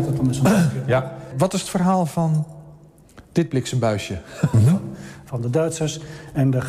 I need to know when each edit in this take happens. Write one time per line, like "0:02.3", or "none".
0:03.3
0:04.5